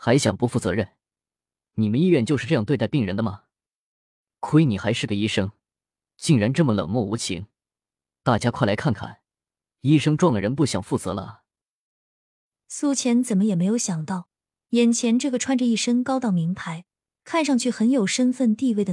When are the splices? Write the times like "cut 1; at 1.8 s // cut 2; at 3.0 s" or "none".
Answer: none